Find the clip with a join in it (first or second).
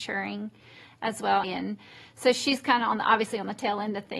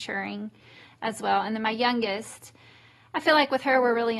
first